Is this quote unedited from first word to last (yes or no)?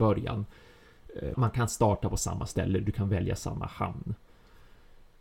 no